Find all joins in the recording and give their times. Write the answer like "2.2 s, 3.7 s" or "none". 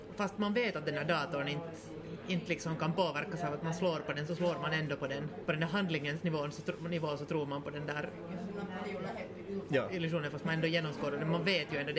5.5 s